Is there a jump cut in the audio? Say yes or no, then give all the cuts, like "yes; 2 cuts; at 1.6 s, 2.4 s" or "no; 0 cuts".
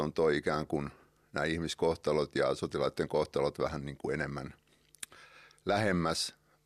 no; 0 cuts